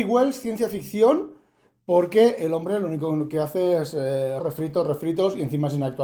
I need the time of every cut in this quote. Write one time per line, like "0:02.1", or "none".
0:04.4